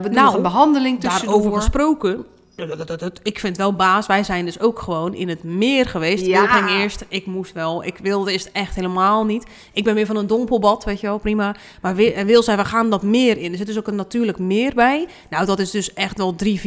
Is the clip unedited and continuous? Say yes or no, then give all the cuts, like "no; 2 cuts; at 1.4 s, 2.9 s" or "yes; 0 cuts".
yes; 0 cuts